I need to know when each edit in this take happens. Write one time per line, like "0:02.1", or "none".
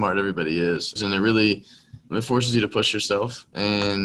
0:01.0
0:02.1